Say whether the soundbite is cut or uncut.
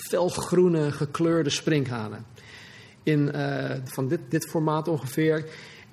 cut